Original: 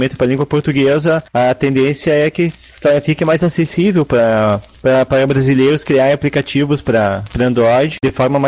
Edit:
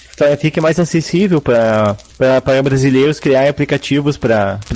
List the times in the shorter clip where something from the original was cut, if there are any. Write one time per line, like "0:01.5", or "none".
none